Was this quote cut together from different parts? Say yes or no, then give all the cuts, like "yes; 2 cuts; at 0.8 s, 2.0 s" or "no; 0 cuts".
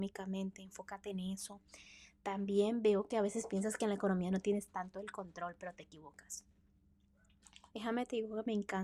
yes; 1 cut; at 7.7 s